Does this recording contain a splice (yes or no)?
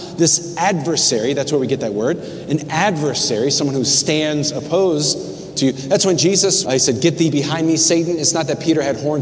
yes